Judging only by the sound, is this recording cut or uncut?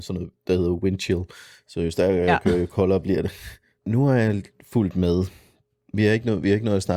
cut